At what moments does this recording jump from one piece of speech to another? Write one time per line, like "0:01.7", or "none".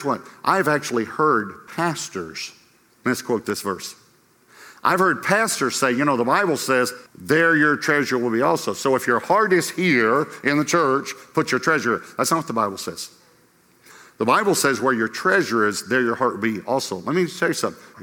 0:07.1